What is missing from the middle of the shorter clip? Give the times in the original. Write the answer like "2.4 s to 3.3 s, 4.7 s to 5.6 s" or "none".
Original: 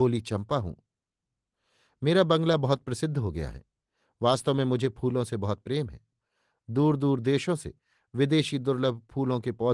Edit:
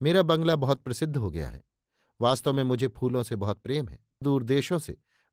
6.2 s to 7.0 s